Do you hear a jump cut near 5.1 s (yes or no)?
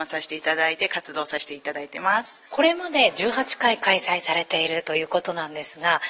no